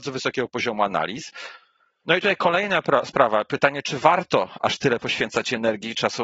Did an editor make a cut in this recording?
no; 0 cuts

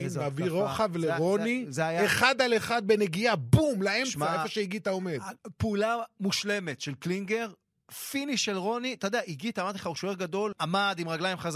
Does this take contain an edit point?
yes; 2 cuts; at 5.4 s, 10.5 s

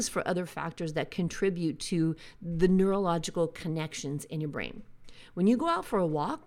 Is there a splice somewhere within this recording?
no; 0 cuts

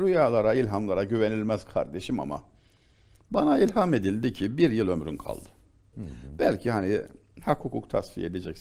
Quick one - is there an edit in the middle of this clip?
yes; 1 cut; at 5.9 s

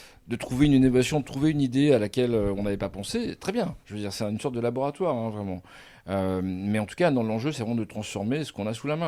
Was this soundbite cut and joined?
no; 0 cuts

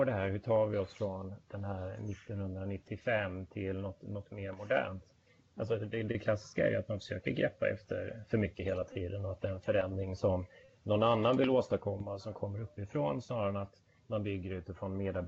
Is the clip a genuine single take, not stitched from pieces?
yes; 0 cuts

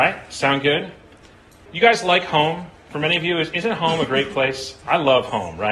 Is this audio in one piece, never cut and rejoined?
no; 1 cut; at 1.7 s

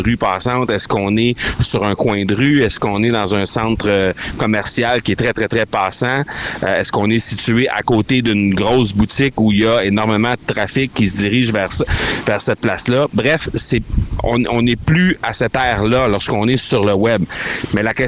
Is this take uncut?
yes; 0 cuts

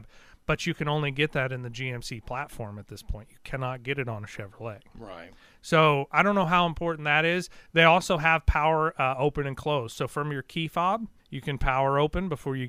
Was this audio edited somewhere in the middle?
yes; 1 cut; at 11.2 s

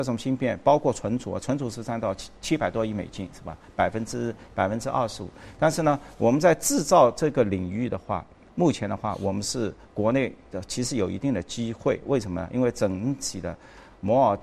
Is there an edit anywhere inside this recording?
no; 0 cuts

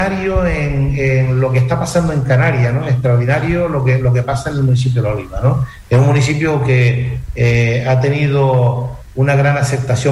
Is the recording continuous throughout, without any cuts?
yes; 0 cuts

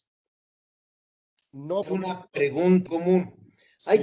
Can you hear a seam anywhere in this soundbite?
yes; 2 cuts; at 1.8 s, 2.9 s

